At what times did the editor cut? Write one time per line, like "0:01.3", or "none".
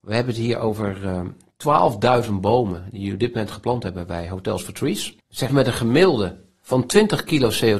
0:05.5